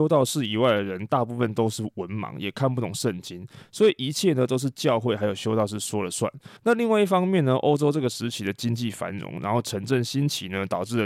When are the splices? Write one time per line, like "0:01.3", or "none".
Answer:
0:06.6